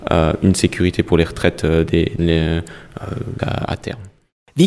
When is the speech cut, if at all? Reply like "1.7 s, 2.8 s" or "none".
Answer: 2.2 s, 3.4 s